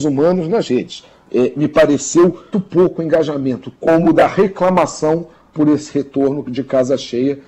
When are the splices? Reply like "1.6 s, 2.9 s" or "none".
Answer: 2.5 s, 3.7 s